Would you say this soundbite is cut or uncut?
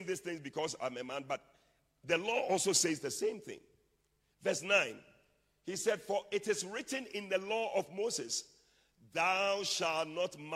uncut